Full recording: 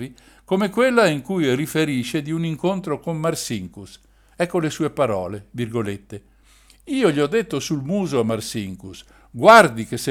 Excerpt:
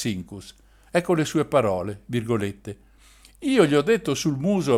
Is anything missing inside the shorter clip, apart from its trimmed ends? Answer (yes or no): no